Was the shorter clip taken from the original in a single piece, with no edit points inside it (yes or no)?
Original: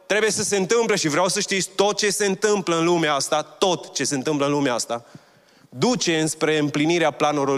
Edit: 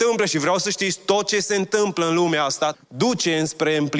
no